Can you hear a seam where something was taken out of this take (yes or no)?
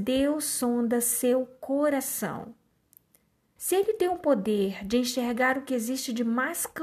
yes